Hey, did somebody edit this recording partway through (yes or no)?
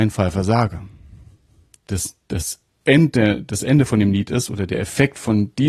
no